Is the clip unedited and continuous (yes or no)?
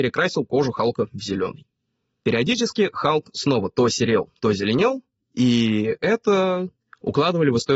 yes